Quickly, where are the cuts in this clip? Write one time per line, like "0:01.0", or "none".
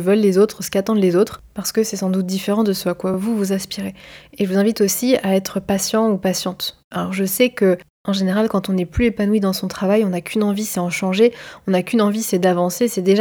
none